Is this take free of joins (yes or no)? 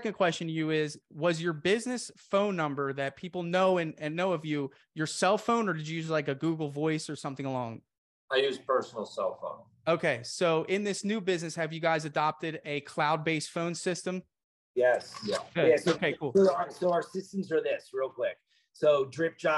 yes